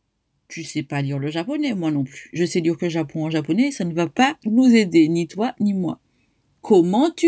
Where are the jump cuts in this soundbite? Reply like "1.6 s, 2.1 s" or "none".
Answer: none